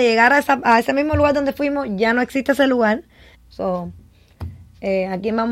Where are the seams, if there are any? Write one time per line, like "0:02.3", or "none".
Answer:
0:03.3